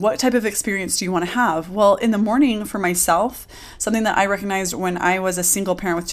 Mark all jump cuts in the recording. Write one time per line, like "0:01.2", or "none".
none